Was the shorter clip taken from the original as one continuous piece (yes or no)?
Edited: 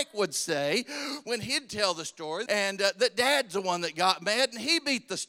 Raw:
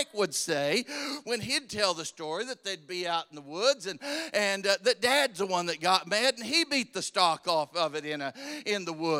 no